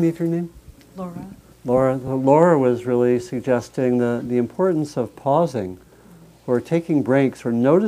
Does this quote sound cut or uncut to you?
uncut